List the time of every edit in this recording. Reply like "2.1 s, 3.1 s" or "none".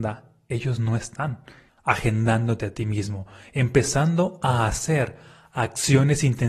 1.7 s